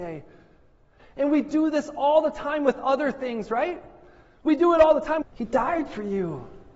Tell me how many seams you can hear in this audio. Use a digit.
2